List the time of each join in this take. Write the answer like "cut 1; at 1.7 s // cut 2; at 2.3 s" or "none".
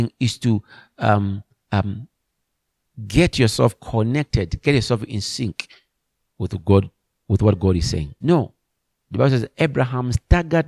cut 1; at 8.2 s